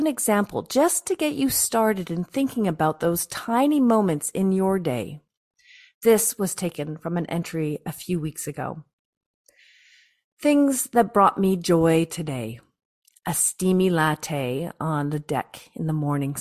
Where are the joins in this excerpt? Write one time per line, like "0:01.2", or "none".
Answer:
none